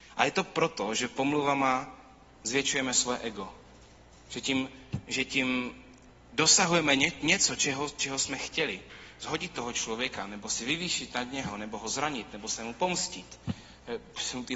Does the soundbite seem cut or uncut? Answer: uncut